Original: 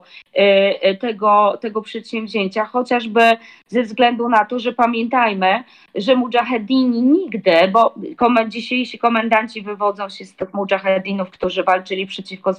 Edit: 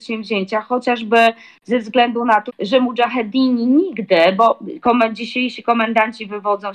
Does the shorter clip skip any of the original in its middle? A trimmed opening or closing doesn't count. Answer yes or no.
yes